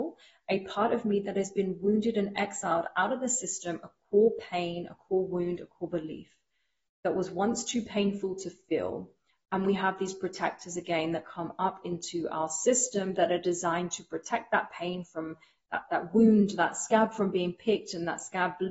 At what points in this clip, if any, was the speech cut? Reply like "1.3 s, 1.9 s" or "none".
none